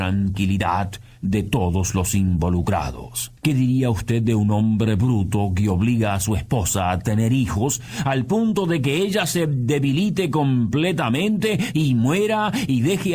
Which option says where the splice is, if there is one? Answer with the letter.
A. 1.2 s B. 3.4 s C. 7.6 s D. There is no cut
B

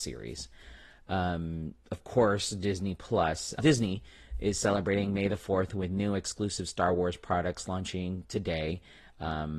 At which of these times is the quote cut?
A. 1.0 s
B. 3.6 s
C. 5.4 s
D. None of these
B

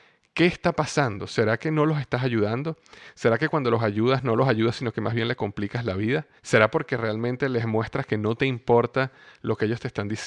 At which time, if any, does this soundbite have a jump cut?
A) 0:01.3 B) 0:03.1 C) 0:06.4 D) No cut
C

